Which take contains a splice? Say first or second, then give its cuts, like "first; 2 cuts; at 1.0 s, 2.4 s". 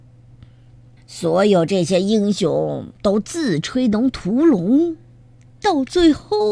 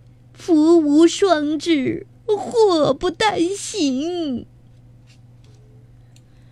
first; 1 cut; at 1.0 s